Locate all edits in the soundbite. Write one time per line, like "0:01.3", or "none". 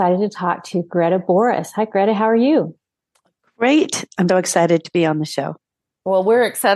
0:04.3